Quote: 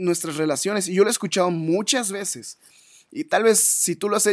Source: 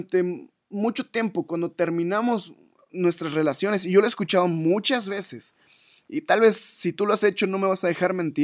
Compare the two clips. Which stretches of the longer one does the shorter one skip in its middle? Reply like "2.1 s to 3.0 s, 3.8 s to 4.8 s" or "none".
none